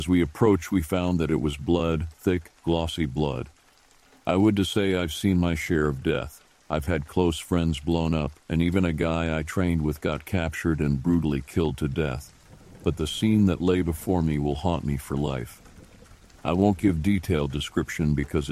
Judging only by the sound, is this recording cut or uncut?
uncut